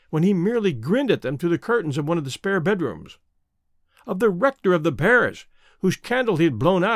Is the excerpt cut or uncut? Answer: uncut